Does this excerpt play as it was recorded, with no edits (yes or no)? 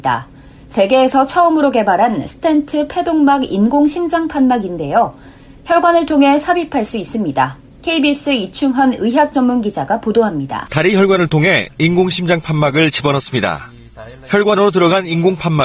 yes